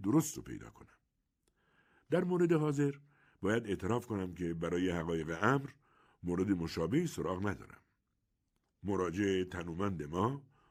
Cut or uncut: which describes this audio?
uncut